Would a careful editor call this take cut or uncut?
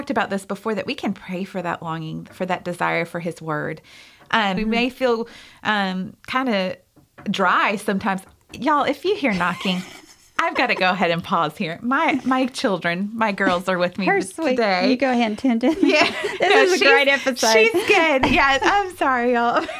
cut